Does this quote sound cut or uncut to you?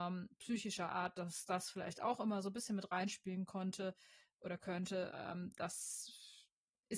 uncut